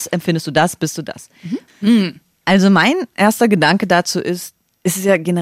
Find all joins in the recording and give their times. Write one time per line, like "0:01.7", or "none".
0:01.7